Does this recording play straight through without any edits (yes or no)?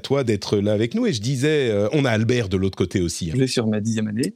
no